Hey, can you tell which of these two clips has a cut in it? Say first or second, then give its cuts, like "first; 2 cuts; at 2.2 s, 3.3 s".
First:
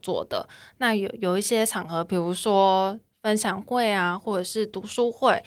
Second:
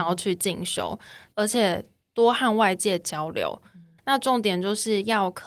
second; 2 cuts; at 1.3 s, 4.0 s